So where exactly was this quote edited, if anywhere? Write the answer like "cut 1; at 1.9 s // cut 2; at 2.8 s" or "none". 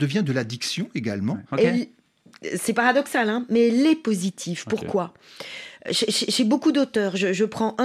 cut 1; at 1.5 s